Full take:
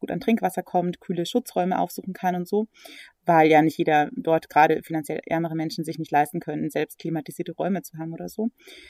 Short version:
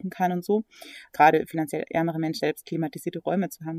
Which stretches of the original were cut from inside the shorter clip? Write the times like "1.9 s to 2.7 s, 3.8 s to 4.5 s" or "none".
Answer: 3.1 s to 4.5 s, 5.8 s to 6.7 s